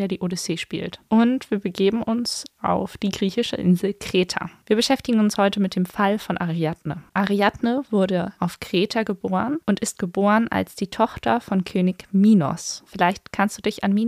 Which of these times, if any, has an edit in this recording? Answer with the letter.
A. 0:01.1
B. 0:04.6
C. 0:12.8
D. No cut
B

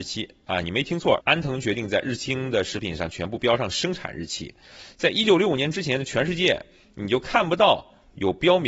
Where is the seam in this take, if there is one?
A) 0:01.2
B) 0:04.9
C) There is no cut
A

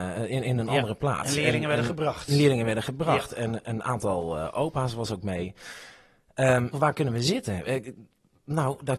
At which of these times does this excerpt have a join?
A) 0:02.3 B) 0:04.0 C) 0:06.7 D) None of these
C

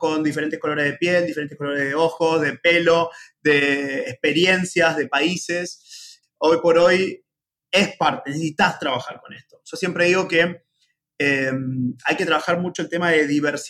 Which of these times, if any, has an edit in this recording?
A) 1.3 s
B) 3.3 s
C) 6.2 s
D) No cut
C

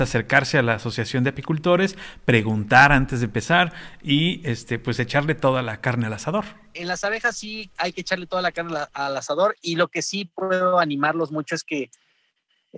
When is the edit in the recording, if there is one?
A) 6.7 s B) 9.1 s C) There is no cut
A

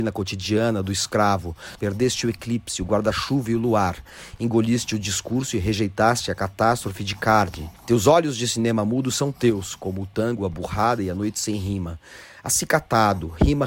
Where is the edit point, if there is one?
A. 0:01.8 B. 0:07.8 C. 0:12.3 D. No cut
A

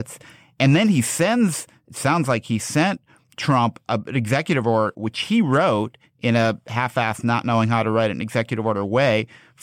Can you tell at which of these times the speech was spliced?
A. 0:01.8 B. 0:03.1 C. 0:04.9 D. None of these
C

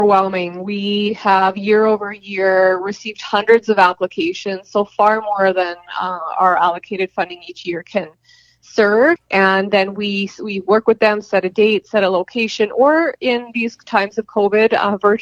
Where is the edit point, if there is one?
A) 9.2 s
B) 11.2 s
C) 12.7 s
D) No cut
A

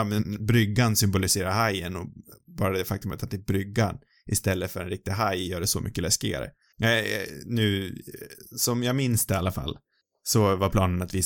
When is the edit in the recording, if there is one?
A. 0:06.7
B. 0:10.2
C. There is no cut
A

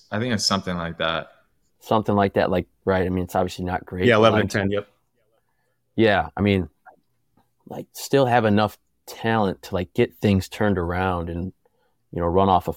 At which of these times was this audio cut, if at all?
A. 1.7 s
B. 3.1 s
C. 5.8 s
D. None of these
D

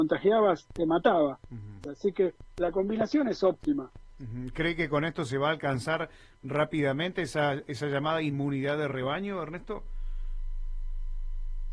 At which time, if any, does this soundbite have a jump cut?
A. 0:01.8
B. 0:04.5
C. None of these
A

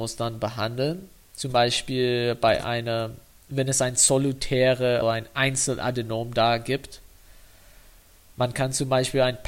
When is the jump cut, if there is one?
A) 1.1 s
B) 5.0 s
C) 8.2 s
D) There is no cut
B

